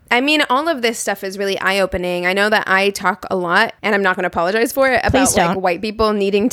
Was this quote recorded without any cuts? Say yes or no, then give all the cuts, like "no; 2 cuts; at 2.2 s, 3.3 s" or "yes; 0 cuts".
no; 1 cut; at 3.8 s